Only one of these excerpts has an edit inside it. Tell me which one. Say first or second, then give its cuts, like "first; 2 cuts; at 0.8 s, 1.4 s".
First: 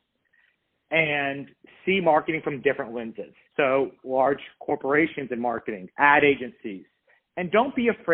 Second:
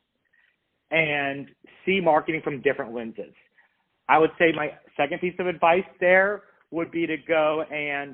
first; 2 cuts; at 3.5 s, 5.9 s